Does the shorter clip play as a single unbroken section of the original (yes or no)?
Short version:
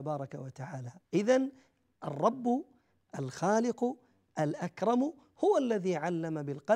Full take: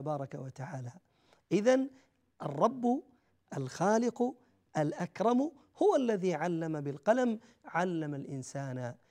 no